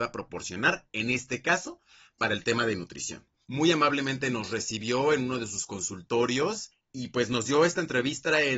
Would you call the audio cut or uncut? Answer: cut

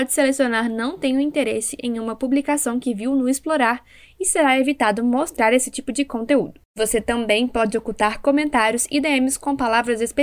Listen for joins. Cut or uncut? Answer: uncut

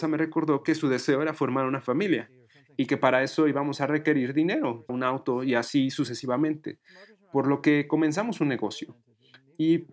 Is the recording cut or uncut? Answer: cut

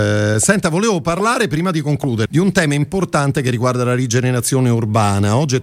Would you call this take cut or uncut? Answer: cut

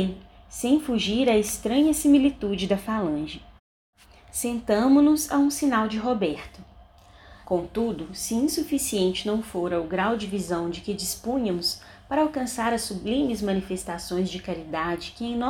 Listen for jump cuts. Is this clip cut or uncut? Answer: cut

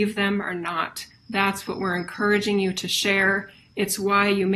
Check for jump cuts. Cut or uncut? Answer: cut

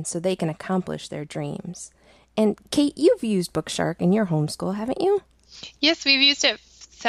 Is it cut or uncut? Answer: uncut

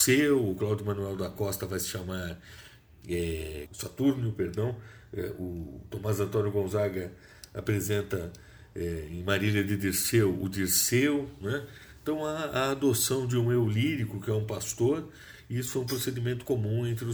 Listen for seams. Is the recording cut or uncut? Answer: cut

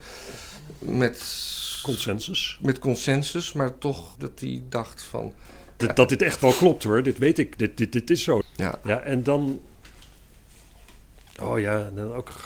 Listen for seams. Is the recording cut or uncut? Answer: cut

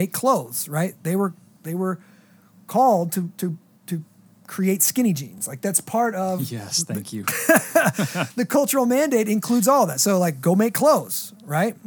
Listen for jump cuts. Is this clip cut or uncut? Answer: uncut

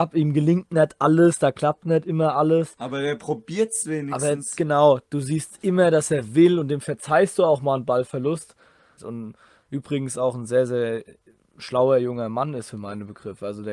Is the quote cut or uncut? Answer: cut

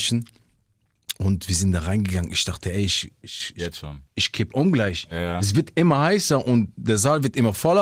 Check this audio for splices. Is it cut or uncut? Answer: uncut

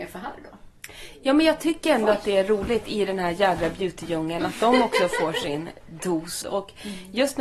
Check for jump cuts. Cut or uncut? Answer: cut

